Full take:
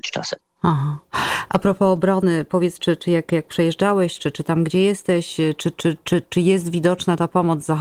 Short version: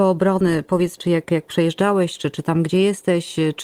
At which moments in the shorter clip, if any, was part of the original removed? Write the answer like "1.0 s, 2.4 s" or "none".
1.0 s